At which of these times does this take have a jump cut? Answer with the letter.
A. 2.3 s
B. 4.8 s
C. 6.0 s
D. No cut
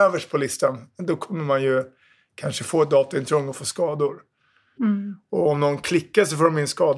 B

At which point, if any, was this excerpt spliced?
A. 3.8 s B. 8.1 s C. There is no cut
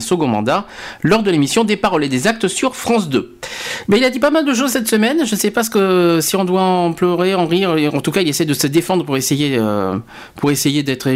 A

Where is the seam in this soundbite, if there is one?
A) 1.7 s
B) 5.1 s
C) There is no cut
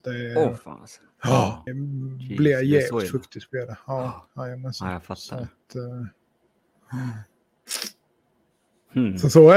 A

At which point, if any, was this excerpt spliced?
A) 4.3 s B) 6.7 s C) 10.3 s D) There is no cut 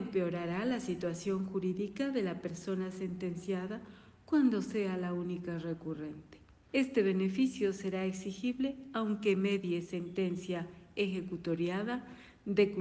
B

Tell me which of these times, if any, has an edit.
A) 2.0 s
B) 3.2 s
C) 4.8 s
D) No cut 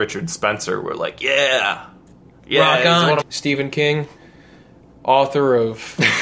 B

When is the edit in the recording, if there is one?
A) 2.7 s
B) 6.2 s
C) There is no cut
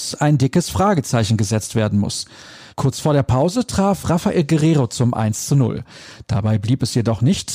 A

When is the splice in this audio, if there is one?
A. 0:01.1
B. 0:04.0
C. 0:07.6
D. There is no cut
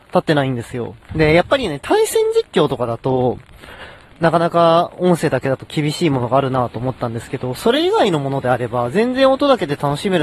A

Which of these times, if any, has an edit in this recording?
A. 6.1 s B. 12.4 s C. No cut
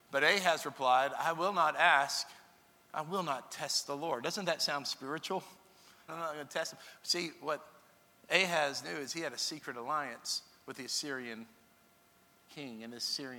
A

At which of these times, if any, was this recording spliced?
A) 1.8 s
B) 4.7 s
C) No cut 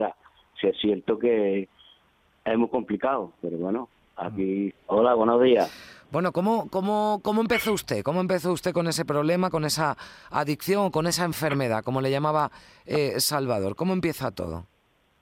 B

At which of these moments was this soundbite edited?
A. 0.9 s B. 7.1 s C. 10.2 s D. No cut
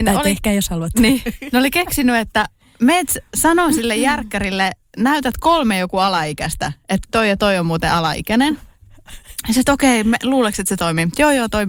B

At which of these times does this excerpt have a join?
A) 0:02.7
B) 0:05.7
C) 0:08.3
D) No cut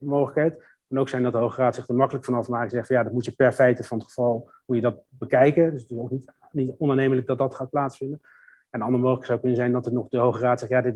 D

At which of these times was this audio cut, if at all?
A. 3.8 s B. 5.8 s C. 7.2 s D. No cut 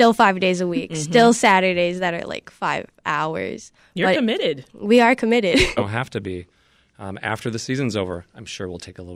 B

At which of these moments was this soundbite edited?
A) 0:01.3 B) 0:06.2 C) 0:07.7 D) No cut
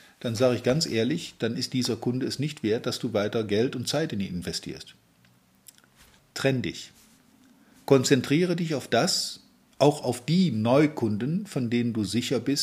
D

